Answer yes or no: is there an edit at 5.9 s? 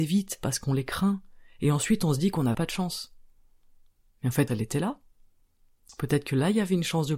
no